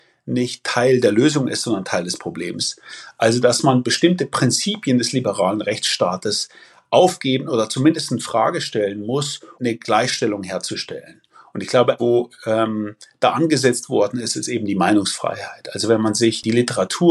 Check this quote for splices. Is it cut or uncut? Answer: cut